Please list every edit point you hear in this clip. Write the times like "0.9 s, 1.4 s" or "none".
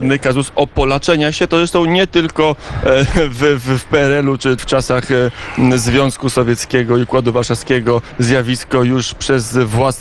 4.6 s